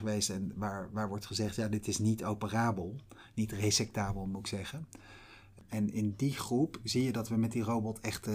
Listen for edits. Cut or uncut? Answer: cut